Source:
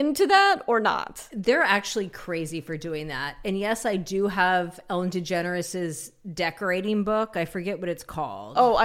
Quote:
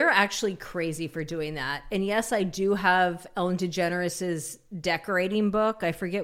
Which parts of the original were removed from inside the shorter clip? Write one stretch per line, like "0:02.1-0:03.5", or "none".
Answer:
none